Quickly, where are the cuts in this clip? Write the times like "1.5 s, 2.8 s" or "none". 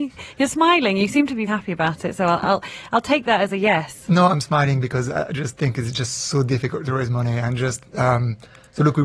1.5 s